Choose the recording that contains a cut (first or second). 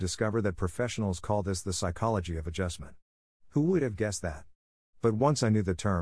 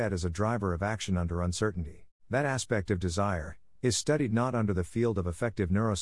second